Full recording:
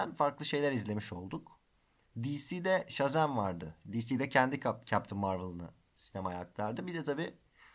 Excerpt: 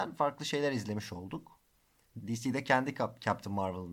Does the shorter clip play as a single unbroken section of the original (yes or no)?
no